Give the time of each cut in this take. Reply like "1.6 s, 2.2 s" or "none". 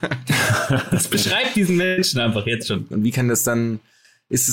2.9 s